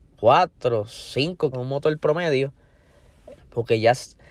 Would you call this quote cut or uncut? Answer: cut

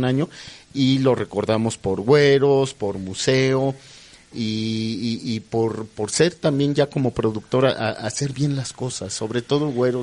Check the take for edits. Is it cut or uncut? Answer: uncut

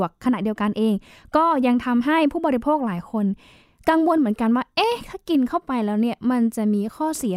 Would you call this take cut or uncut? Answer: uncut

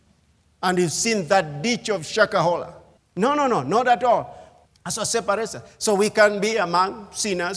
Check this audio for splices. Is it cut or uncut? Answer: cut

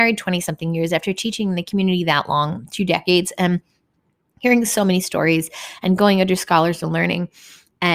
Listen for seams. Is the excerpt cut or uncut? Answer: uncut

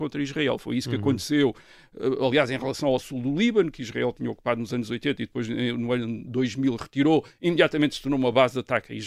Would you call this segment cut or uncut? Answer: uncut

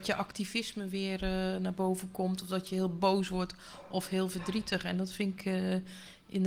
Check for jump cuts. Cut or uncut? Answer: uncut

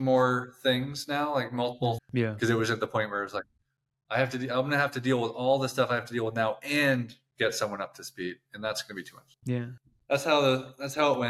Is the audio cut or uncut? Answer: cut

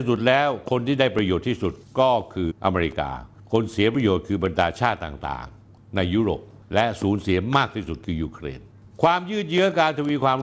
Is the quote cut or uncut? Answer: cut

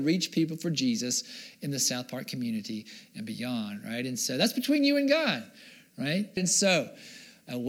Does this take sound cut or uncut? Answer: cut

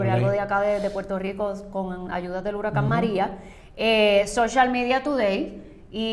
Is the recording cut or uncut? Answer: uncut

